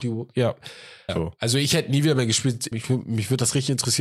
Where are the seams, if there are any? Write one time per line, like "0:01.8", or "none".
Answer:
0:01.1
0:02.7